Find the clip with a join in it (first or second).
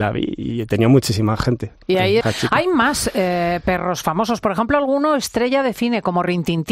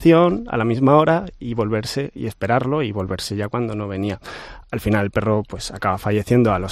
first